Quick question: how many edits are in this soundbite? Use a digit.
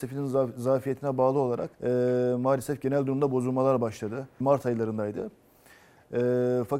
2